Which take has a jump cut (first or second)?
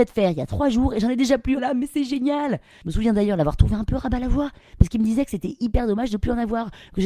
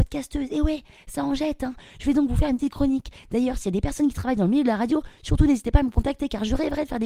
first